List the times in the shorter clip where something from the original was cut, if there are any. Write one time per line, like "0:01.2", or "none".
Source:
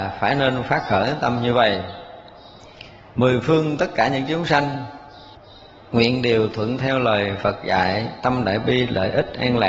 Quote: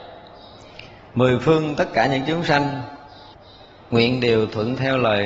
none